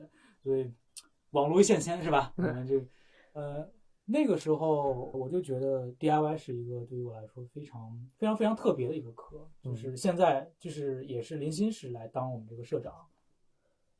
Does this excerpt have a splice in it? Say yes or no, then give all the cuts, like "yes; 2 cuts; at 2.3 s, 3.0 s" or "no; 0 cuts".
yes; 1 cut; at 5.1 s